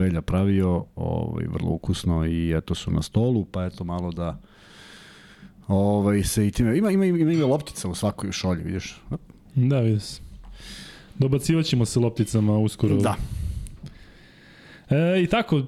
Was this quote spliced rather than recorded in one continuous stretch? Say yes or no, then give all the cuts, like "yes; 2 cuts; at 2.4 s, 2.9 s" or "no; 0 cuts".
no; 0 cuts